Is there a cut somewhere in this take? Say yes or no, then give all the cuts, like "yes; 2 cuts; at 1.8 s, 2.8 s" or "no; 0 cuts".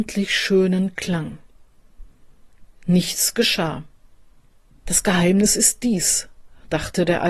yes; 2 cuts; at 2.6 s, 4.8 s